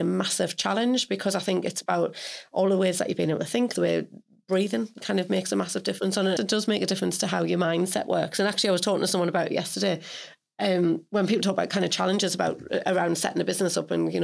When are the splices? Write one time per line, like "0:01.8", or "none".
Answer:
0:03.7
0:06.4